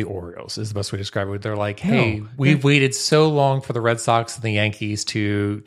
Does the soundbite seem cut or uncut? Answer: uncut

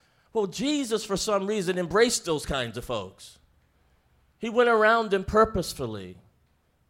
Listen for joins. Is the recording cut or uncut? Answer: uncut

